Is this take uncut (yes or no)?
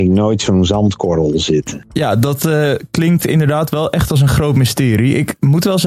yes